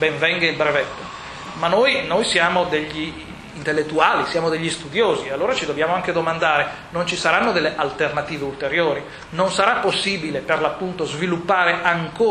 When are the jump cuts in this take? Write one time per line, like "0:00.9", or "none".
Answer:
none